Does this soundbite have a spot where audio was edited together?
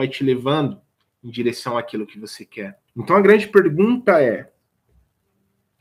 yes; 1 cut; at 2.9 s

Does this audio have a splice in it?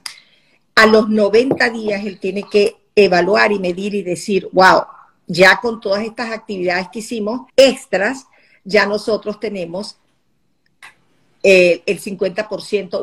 yes; 1 cut; at 7.5 s

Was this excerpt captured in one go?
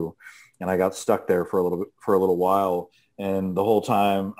yes; 0 cuts

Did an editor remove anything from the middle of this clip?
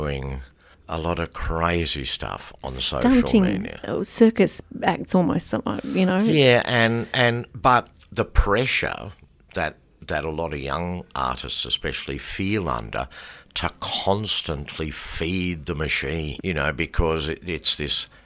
yes; 1 cut; at 16.4 s

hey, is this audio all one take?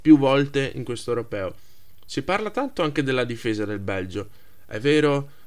yes; 0 cuts

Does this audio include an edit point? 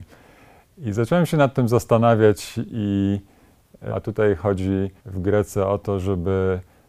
yes; 2 cuts; at 3.9 s, 5.0 s

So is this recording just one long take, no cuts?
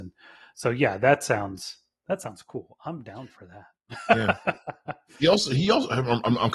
yes; 0 cuts

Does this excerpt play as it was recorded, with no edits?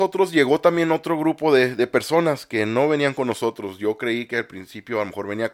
yes; 0 cuts

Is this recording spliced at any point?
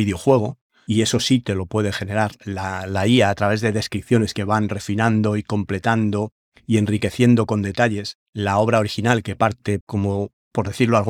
yes; 2 cuts; at 8.3 s, 9.8 s

